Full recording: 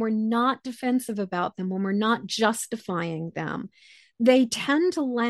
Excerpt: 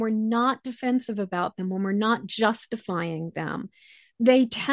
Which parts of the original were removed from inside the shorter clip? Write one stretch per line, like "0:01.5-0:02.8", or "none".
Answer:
none